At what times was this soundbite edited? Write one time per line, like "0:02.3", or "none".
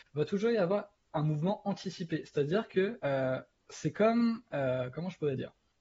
none